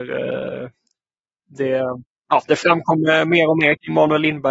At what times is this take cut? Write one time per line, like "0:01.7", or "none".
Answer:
none